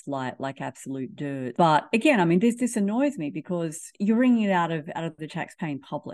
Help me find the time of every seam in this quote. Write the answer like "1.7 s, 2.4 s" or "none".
1.5 s